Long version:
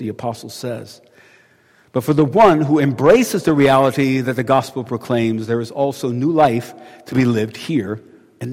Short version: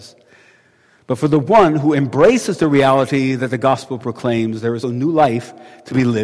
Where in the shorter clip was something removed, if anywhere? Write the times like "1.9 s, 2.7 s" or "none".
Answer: 4.8 s